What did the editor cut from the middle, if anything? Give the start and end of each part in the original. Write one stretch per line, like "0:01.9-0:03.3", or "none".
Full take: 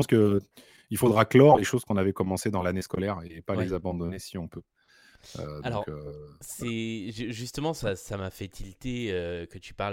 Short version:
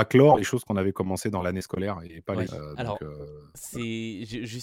0:03.7-0:05.3

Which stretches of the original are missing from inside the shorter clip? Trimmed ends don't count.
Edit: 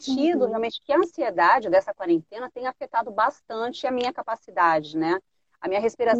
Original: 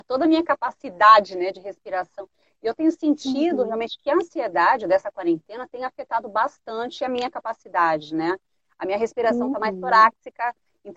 none

